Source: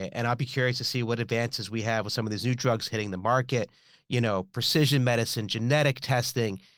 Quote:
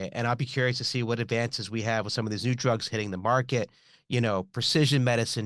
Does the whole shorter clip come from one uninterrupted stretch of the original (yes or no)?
yes